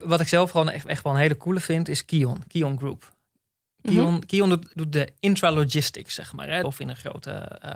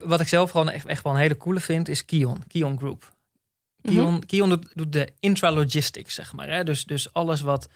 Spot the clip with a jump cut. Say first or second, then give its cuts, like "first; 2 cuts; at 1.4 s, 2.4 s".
first; 1 cut; at 6.6 s